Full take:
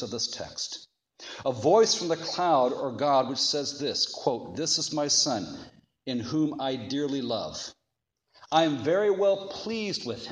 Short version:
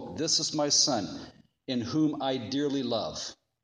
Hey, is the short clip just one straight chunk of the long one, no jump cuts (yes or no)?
yes